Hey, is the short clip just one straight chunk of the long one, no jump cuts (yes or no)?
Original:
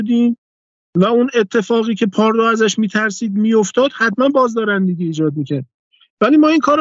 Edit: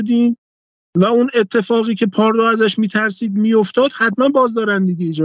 yes